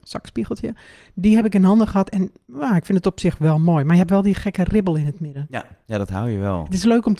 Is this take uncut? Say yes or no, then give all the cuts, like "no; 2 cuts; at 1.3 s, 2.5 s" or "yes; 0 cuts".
yes; 0 cuts